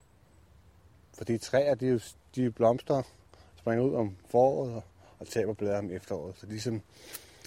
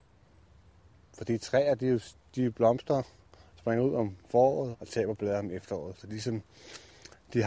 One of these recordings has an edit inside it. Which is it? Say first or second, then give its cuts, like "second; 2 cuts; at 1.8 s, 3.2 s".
second; 1 cut; at 4.7 s